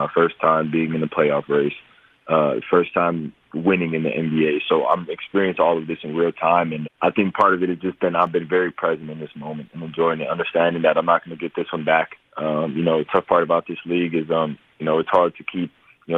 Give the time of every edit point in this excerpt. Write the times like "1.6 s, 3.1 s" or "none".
6.8 s